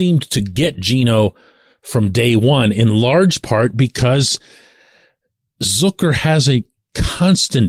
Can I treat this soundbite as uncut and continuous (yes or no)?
yes